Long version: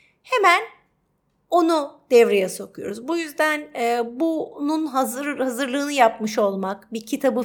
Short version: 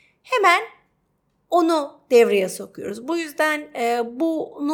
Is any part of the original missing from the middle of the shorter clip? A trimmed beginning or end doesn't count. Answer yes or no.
no